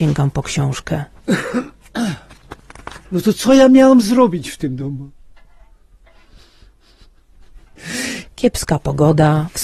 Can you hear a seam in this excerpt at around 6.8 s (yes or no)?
no